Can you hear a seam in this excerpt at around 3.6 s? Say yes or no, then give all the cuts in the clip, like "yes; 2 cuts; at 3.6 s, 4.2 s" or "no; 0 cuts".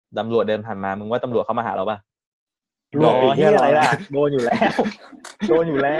no; 0 cuts